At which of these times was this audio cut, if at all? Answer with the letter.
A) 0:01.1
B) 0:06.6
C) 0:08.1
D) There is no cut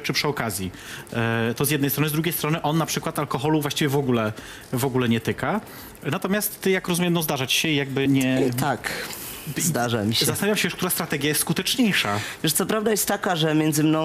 C